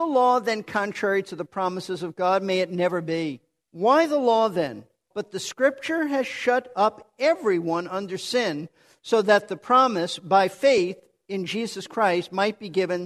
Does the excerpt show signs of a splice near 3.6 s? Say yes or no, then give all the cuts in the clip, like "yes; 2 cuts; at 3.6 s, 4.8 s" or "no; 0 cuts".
yes; 2 cuts; at 3.6 s, 5.1 s